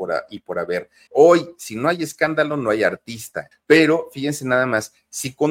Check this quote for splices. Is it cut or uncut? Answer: cut